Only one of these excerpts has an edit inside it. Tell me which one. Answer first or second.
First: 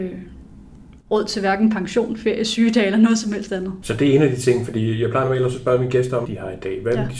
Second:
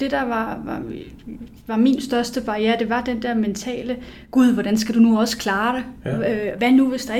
first